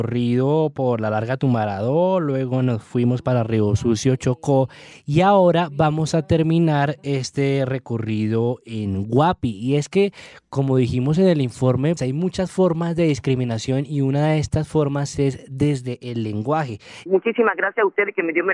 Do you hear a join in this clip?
yes; 2 cuts; at 12.0 s, 17.1 s

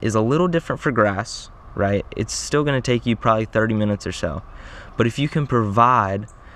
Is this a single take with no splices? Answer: yes; 0 cuts

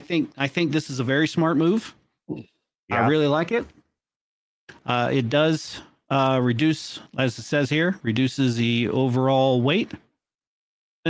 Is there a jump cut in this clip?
no; 0 cuts

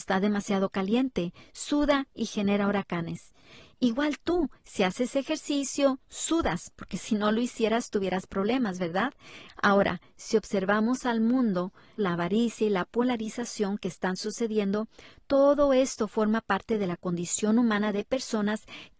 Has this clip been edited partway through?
yes; 2 cuts; at 9.5 s, 12.0 s

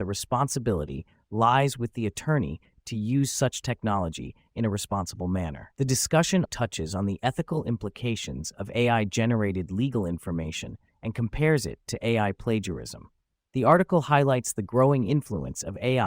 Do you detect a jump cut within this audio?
yes; 1 cut; at 6.5 s

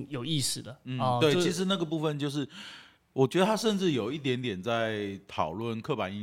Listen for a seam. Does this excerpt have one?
no; 0 cuts

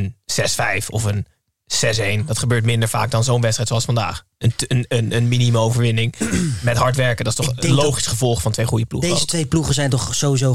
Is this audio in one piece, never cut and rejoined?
yes; 0 cuts

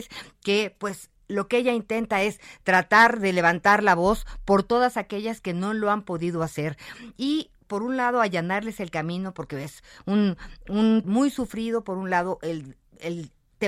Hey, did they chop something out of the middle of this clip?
yes; 1 cut; at 11.0 s

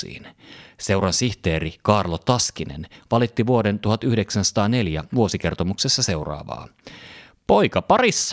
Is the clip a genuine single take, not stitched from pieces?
yes; 0 cuts

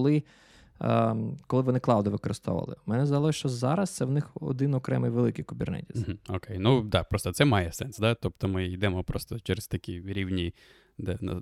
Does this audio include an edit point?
no; 0 cuts

